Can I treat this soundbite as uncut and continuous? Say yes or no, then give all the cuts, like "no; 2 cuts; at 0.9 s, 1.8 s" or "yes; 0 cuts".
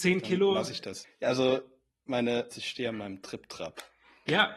no; 2 cuts; at 1.0 s, 2.5 s